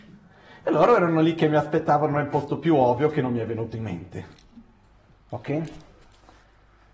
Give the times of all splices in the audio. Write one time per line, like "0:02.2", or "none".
none